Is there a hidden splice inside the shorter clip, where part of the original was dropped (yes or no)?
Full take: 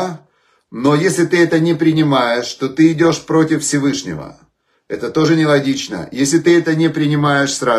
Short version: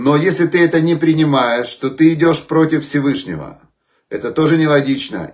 no